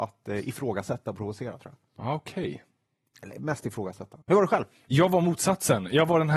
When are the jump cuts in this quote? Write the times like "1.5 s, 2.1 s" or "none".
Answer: 4.2 s